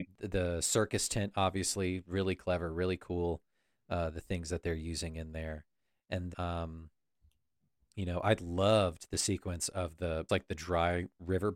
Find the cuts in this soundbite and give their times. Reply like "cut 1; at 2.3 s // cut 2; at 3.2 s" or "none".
cut 1; at 6.3 s // cut 2; at 10.3 s